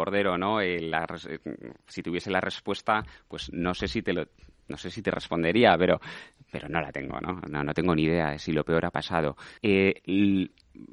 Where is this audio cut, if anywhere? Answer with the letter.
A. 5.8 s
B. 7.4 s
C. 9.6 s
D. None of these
C